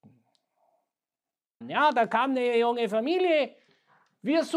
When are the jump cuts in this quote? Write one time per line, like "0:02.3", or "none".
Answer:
0:01.6